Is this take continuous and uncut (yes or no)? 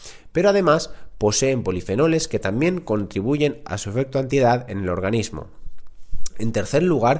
yes